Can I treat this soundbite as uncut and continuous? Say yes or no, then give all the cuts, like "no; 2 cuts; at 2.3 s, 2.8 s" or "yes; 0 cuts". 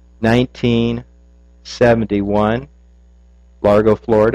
yes; 0 cuts